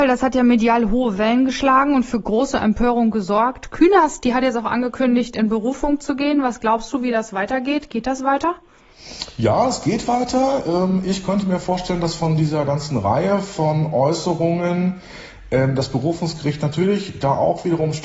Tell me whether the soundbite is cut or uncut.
uncut